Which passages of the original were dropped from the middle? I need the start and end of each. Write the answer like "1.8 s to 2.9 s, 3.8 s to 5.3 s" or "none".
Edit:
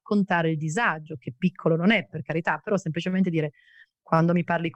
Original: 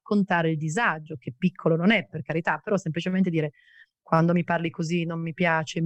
none